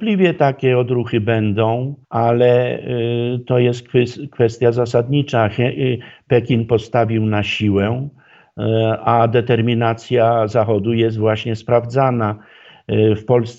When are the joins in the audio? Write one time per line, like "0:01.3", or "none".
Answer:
0:02.0

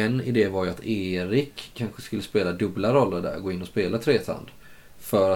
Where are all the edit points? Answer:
none

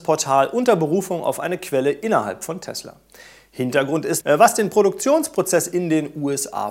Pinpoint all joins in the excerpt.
0:04.2

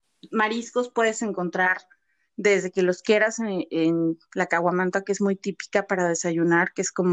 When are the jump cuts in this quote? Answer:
none

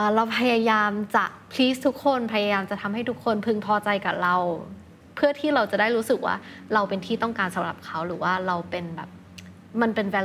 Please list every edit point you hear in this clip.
none

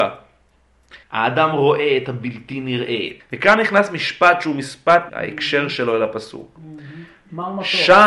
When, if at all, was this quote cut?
0:01.0
0:03.2
0:05.1

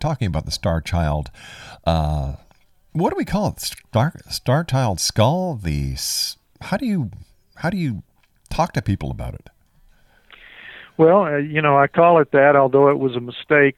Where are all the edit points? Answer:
none

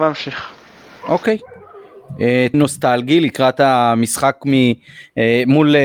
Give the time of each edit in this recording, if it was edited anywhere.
0:02.5

